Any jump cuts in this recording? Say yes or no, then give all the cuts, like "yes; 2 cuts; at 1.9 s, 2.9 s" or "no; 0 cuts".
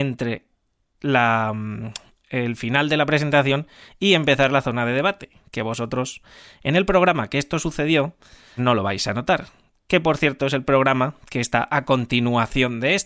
yes; 1 cut; at 8.6 s